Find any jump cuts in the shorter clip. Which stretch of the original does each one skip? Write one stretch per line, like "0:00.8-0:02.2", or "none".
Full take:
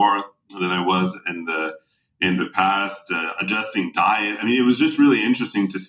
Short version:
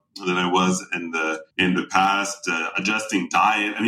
0:01.8-0:02.1